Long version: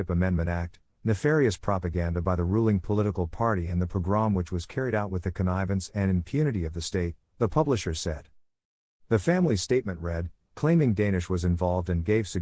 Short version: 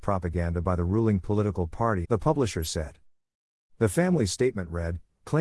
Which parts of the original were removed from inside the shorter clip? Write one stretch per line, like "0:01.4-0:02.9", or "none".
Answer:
0:03.6-0:07.3